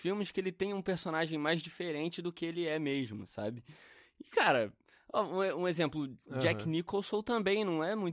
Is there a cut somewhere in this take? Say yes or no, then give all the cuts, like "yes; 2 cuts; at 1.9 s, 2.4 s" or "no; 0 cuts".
no; 0 cuts